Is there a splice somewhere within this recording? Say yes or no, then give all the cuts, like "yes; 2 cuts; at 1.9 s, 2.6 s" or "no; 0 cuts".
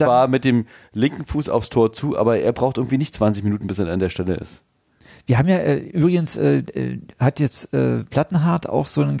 no; 0 cuts